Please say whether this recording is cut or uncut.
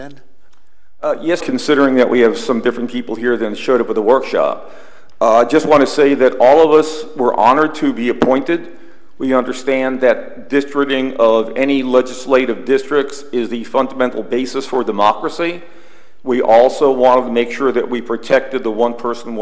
cut